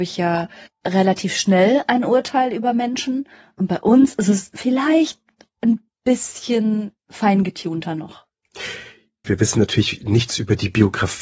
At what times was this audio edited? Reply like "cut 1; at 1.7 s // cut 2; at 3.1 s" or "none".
cut 1; at 9.2 s